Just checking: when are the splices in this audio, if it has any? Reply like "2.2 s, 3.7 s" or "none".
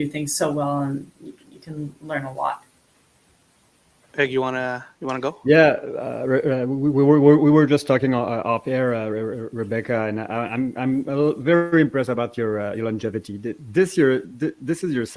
none